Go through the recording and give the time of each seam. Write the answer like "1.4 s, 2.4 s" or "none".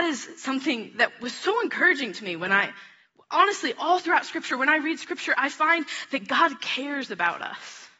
none